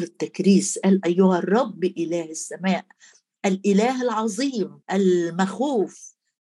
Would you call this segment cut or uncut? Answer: cut